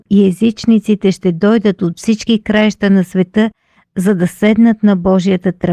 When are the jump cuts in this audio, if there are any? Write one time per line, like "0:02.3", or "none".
none